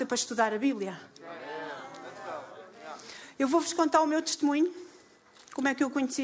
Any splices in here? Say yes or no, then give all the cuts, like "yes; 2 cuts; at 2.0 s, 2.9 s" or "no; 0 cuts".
no; 0 cuts